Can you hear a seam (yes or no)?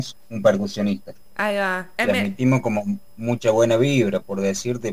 yes